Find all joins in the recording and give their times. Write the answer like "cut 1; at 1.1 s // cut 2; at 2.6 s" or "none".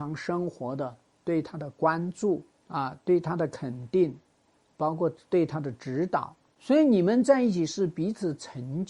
none